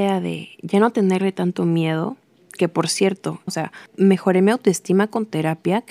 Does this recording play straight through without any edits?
no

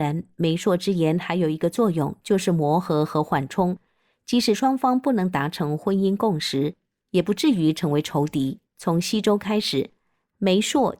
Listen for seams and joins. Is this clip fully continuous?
no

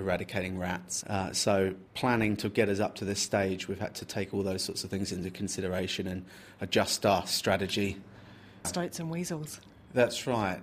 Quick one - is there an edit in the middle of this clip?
yes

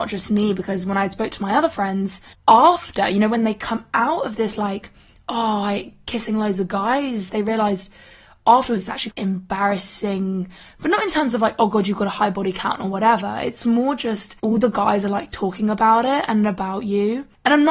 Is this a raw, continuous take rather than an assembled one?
no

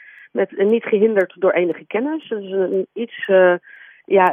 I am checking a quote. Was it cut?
no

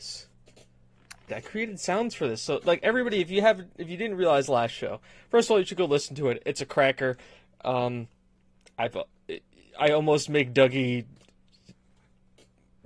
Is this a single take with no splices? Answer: no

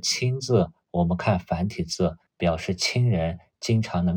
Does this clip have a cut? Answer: yes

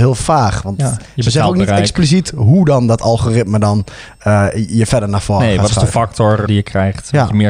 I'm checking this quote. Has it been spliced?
yes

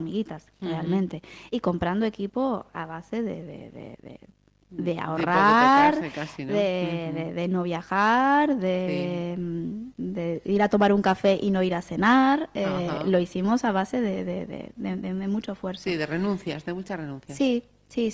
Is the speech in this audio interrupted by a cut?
no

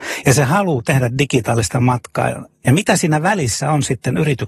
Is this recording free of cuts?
no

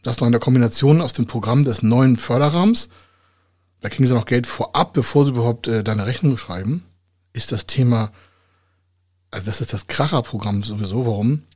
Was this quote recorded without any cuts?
yes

